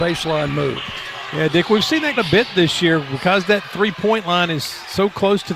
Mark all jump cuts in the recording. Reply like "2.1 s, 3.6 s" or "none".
2.2 s